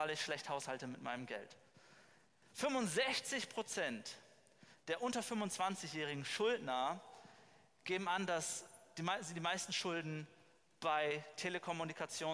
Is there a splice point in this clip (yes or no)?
no